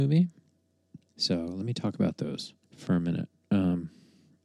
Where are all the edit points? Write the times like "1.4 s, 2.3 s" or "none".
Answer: 1.1 s, 2.6 s